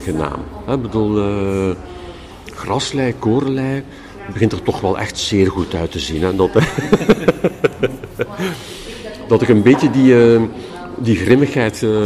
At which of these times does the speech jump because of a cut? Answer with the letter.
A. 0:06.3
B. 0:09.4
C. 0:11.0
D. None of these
D